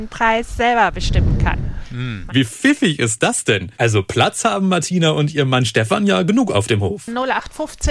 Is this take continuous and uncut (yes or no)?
no